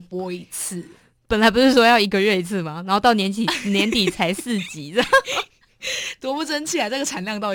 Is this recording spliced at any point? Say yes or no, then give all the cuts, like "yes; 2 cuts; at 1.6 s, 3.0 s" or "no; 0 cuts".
no; 0 cuts